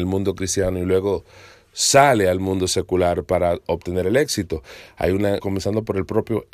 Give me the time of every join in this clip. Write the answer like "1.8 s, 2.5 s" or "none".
5.4 s